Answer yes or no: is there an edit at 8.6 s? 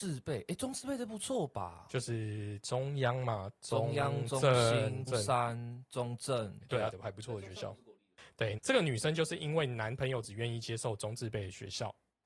yes